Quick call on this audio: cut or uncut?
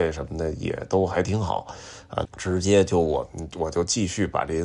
cut